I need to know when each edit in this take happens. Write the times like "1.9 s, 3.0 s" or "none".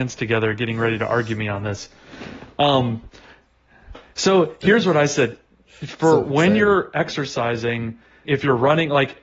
8.3 s